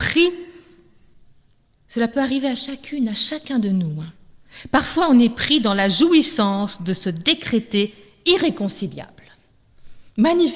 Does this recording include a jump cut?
no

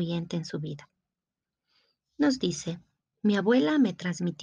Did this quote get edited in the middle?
no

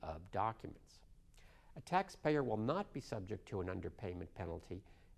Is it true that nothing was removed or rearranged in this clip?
yes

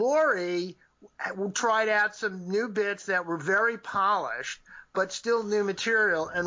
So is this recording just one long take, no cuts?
yes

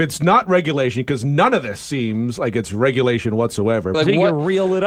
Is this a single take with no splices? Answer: no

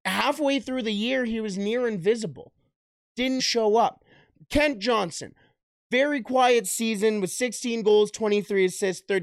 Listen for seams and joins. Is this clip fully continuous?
no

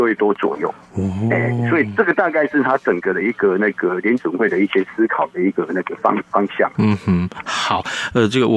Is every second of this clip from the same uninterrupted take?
yes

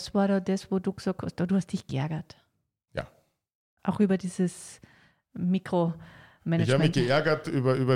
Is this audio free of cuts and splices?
yes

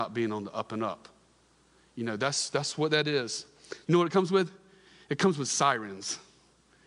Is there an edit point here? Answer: yes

